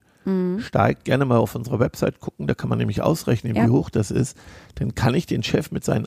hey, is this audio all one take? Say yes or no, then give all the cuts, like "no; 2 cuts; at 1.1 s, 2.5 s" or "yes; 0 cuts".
yes; 0 cuts